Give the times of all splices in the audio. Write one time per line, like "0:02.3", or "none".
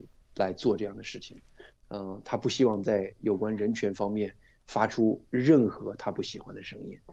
0:01.7